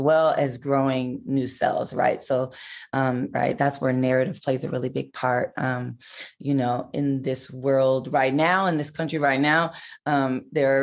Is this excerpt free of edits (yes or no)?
no